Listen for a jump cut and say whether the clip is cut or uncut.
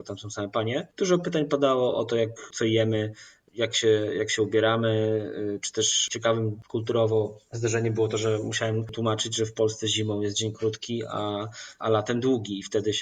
uncut